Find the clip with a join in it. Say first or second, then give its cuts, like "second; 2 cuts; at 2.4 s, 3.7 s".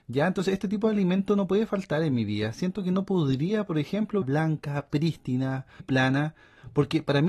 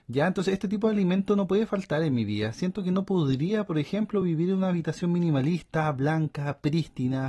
first; 2 cuts; at 4.2 s, 5.8 s